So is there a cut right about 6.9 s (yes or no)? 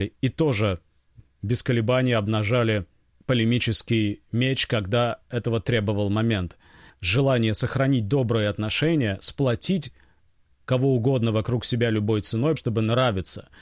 yes